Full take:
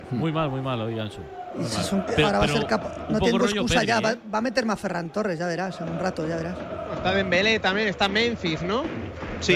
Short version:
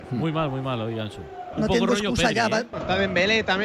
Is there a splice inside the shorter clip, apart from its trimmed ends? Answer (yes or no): yes